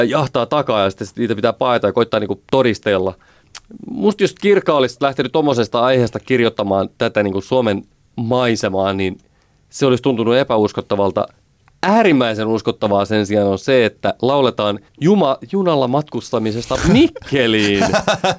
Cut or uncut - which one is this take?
cut